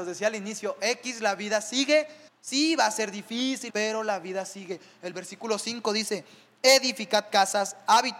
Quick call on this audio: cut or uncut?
cut